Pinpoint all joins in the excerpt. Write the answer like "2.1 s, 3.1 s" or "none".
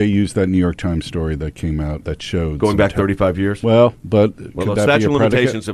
2.0 s